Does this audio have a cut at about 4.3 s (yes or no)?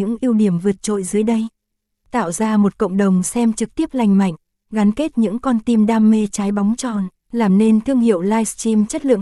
no